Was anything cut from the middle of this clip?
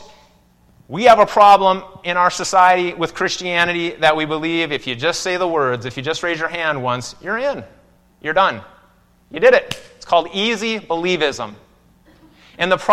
no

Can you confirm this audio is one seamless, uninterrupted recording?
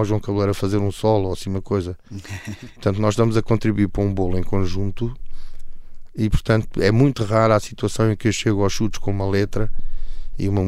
yes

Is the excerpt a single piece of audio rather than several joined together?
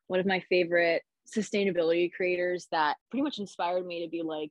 no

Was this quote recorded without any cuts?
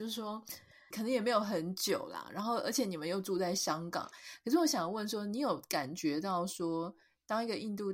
no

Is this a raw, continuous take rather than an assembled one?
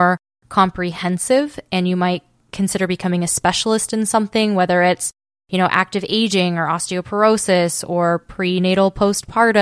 yes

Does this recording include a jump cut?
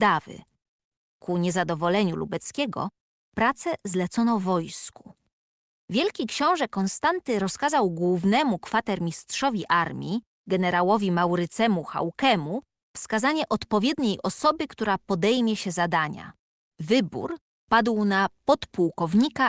no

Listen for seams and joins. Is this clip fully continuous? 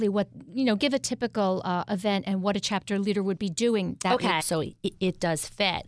no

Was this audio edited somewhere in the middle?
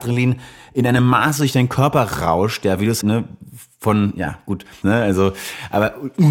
yes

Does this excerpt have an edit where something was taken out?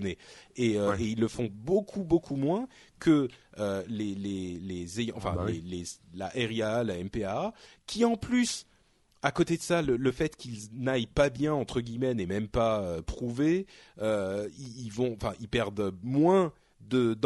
no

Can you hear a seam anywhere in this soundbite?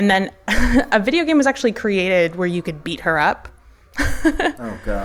no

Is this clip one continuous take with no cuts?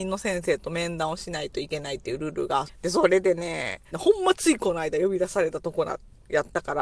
no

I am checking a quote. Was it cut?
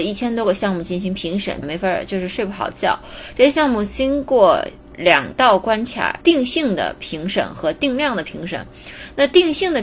yes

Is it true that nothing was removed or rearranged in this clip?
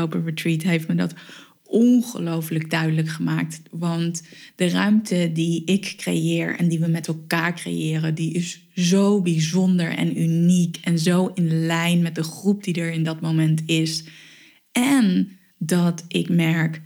yes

